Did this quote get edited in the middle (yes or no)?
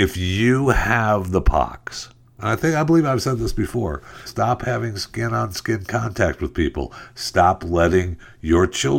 yes